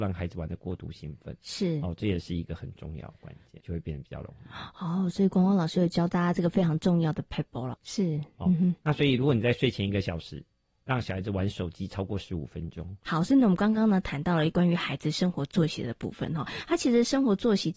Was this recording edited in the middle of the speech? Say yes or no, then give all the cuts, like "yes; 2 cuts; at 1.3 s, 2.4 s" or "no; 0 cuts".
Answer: yes; 3 cuts; at 3.6 s, 7.7 s, 13.0 s